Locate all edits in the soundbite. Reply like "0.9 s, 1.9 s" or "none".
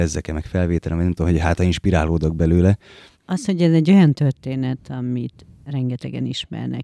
3.1 s